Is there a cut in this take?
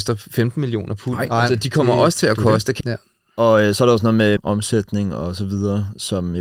yes; 2 cuts; at 2.8 s, 4.4 s

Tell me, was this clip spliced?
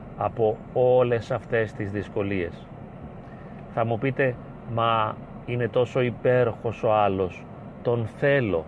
no; 0 cuts

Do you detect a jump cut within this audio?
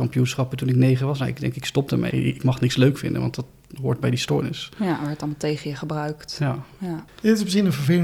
yes; 1 cut; at 2.1 s

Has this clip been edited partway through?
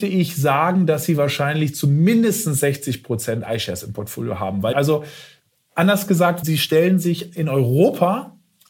yes; 2 cuts; at 4.7 s, 6.4 s

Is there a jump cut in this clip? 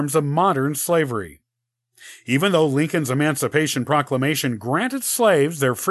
no; 0 cuts

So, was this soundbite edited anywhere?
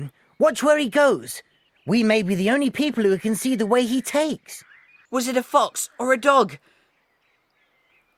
yes; 1 cut; at 5.1 s

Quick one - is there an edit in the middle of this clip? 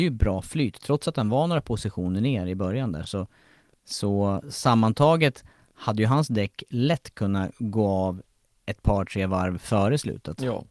no; 0 cuts

